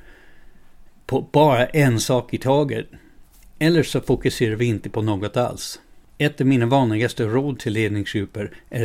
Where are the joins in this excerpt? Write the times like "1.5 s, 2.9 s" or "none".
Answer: none